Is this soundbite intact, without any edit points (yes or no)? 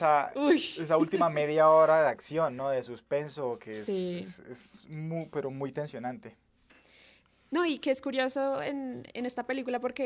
yes